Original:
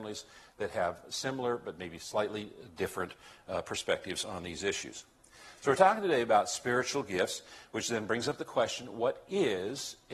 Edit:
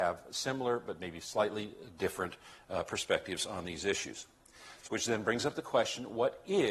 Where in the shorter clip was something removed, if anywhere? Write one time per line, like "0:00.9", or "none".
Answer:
0:04.9